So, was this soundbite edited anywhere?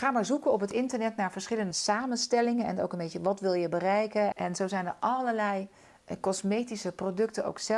yes; 2 cuts; at 1.7 s, 4.3 s

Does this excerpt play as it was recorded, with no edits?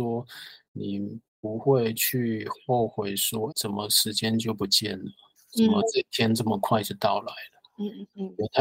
no; 1 cut; at 3.5 s

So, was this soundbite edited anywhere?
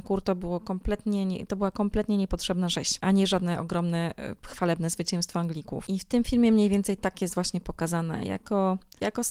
no; 0 cuts

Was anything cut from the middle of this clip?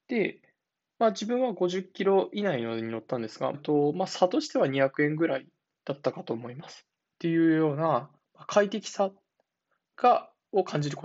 yes; 2 cuts; at 3.5 s, 7.0 s

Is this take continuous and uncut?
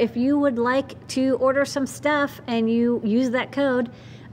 yes; 0 cuts

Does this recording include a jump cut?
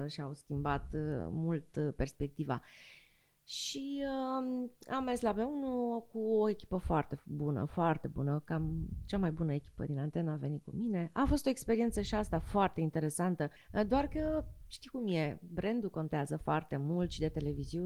yes; 1 cut; at 13.6 s

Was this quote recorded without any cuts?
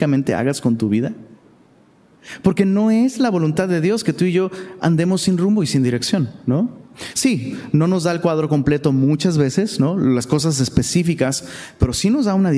yes; 0 cuts

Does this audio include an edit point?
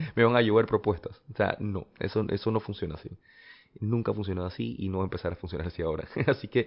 no; 0 cuts

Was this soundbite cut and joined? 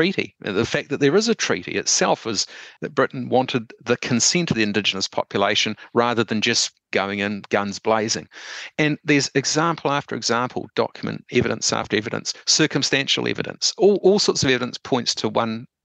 yes; 1 cut; at 2.8 s

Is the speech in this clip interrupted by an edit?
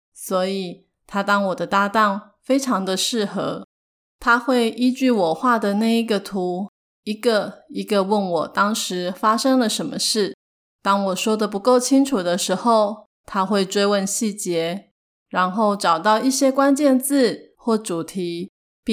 no; 0 cuts

